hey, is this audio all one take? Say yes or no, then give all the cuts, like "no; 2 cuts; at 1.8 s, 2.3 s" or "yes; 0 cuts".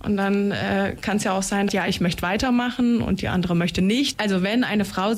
no; 2 cuts; at 1.7 s, 4.1 s